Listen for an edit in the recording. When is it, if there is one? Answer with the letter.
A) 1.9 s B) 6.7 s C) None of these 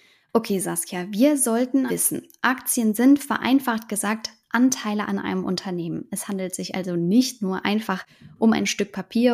A